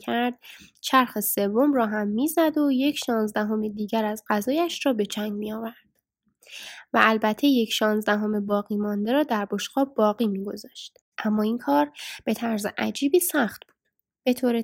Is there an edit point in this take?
yes; 1 cut; at 11.1 s

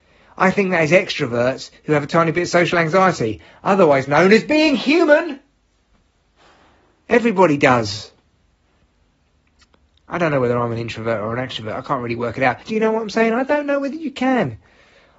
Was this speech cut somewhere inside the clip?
yes; 1 cut; at 12.6 s

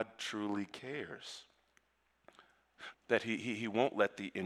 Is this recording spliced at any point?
yes; 1 cut; at 2.9 s

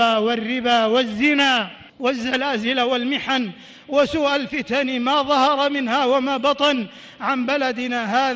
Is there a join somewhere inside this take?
yes; 1 cut; at 1.9 s

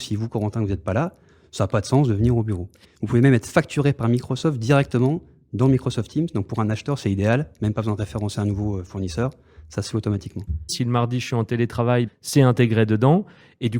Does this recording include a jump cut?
yes; 3 cuts; at 2.8 s, 10.7 s, 12.1 s

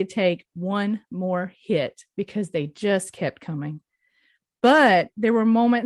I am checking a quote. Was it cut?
no; 0 cuts

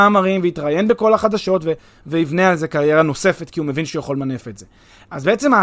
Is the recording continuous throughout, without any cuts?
yes; 0 cuts

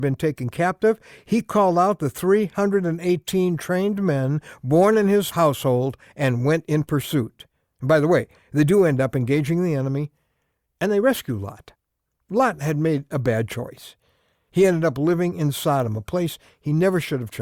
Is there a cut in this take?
no; 0 cuts

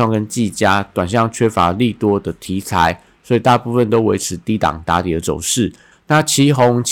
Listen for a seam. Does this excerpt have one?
yes; 1 cut; at 5.9 s

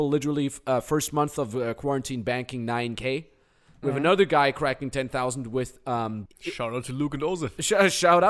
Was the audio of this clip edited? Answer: yes; 2 cuts; at 3.8 s, 6.3 s

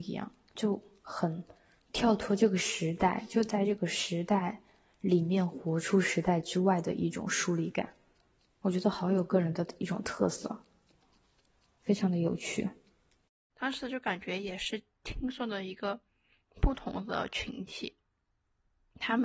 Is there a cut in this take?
yes; 1 cut; at 13.5 s

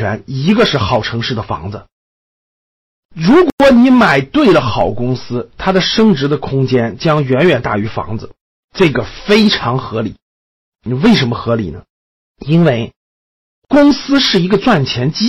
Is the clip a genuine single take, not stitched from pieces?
yes; 0 cuts

